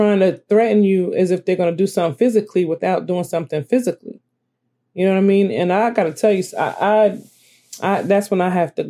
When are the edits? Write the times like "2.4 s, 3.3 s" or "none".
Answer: none